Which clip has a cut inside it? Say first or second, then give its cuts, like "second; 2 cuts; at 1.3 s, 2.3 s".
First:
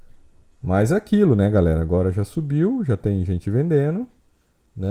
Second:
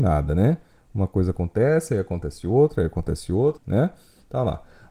second; 1 cut; at 3.6 s